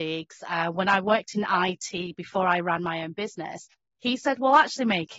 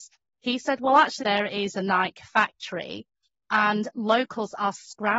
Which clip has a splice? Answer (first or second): second